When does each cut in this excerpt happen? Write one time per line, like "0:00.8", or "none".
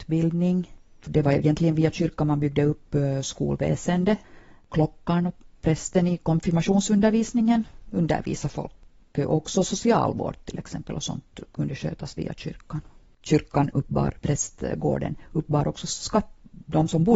0:14.2

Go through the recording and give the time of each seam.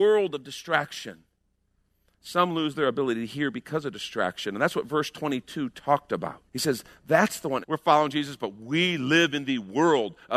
0:06.5
0:07.6

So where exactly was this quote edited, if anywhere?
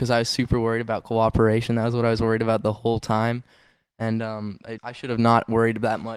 0:04.8

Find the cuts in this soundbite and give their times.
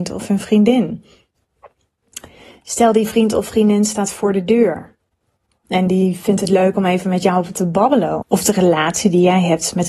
0:05.6
0:08.2

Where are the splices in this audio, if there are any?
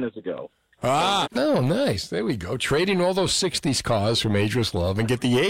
0:01.2

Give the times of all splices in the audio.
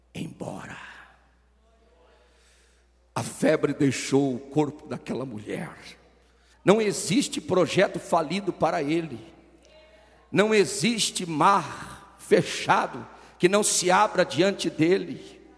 0:06.5

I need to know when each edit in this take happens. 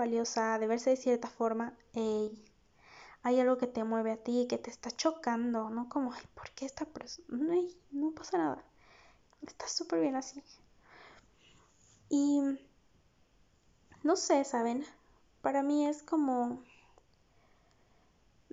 0:09.2

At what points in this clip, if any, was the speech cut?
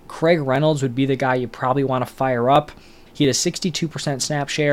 0:03.1

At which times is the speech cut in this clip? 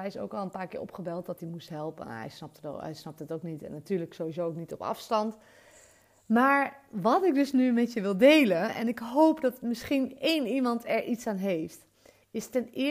none

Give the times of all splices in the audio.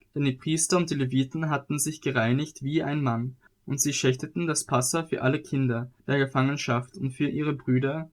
0:03.5
0:06.0

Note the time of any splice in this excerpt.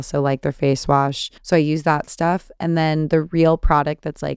0:01.4

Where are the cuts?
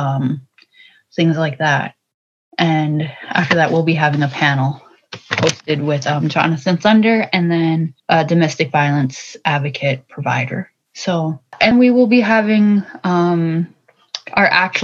0:08.0
0:11.7

